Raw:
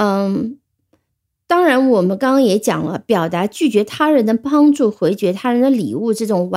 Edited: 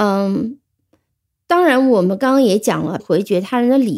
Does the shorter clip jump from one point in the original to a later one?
yes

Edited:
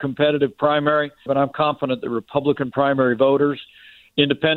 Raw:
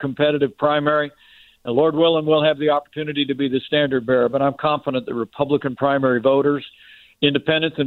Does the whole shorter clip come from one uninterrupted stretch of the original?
no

